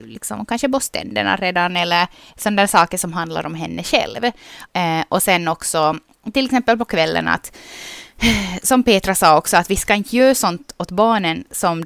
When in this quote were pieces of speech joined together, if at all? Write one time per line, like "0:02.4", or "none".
0:04.7

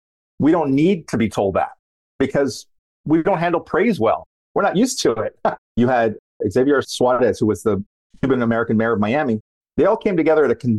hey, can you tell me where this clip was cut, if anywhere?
0:05.6
0:09.6

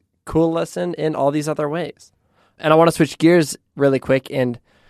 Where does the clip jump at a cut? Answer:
none

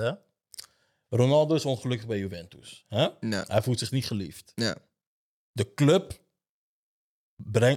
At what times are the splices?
none

